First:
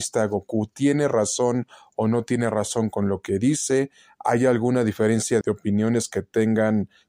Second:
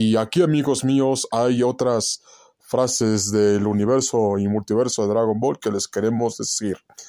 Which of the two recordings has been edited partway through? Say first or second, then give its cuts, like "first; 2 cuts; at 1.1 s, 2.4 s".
first; 1 cut; at 5.4 s